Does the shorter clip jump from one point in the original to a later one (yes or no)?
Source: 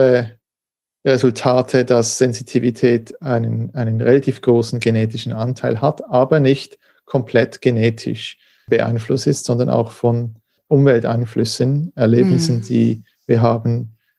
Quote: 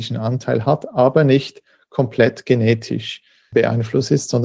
no